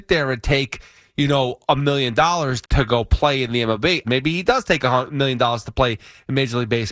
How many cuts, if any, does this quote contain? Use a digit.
2